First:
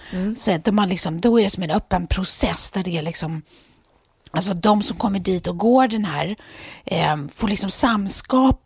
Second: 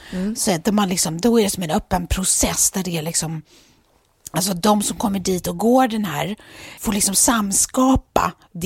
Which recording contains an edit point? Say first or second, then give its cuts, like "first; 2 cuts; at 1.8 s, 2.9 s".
second; 1 cut; at 6.8 s